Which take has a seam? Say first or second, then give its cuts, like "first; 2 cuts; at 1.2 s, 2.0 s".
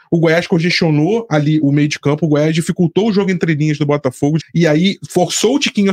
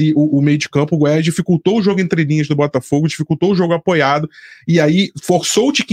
first; 2 cuts; at 1.6 s, 4.4 s